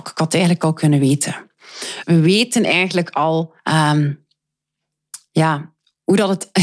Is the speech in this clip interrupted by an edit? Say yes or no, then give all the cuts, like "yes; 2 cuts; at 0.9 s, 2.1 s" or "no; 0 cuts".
yes; 2 cuts; at 2.0 s, 3.6 s